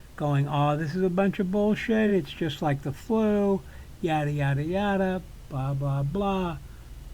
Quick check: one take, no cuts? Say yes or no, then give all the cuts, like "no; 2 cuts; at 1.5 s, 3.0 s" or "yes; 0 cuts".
yes; 0 cuts